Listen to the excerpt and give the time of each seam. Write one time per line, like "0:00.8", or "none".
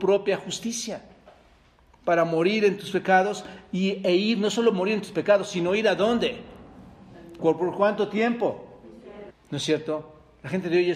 0:07.4
0:09.3